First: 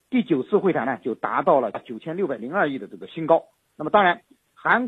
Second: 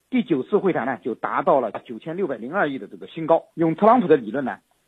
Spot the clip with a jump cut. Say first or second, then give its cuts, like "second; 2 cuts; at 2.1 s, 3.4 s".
second; 1 cut; at 3.5 s